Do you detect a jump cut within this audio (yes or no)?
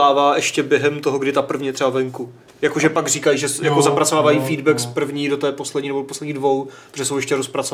no